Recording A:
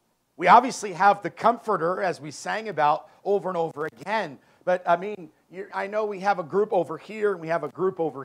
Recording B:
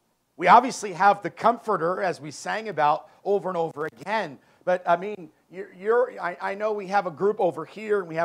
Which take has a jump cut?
A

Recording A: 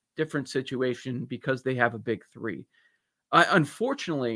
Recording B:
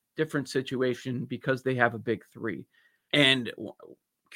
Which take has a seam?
B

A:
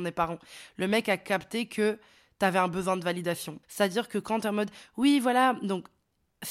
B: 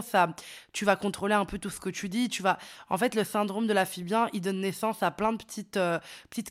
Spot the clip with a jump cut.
A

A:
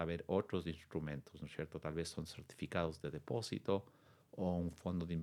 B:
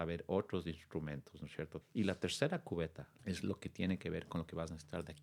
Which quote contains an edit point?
B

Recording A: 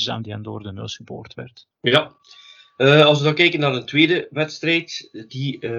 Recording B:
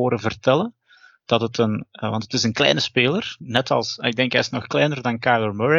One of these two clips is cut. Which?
A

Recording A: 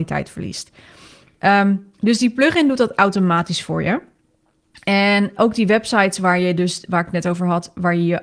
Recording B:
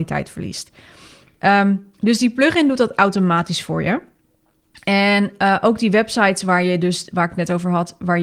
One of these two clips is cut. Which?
A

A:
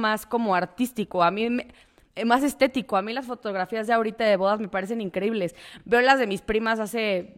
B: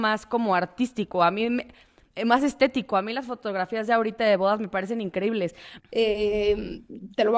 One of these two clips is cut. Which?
B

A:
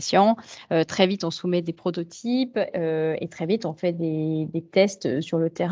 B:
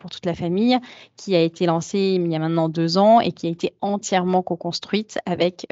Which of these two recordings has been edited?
A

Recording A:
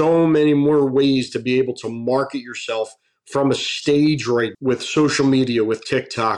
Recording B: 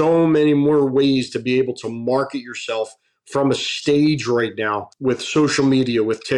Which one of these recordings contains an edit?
A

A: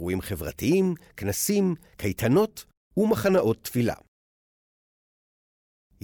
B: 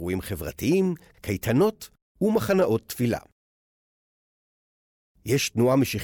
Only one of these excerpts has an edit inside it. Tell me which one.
B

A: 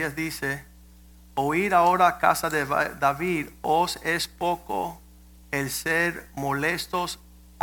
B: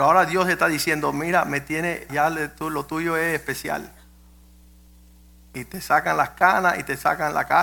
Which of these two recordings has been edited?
B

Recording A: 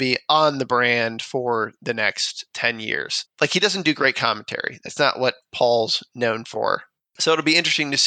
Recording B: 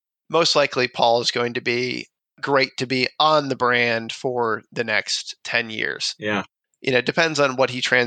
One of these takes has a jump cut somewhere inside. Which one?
A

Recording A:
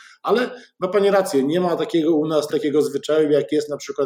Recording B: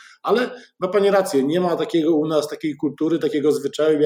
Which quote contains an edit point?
A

